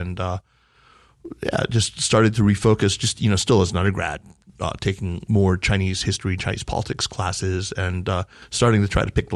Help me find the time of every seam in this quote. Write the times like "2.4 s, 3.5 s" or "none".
none